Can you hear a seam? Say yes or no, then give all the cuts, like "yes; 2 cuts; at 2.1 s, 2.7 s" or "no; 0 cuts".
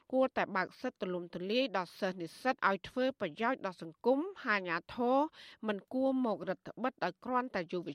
yes; 1 cut; at 2.6 s